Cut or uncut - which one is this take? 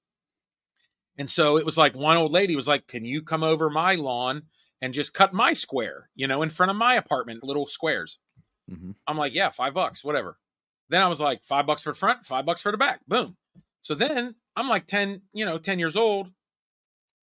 cut